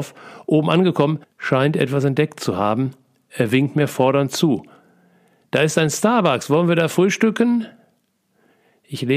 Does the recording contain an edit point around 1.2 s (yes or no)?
yes